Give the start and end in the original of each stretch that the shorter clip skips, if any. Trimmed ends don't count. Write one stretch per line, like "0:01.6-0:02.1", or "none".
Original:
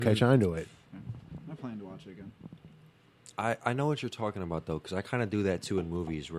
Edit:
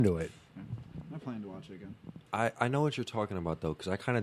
0:02.6-0:03.3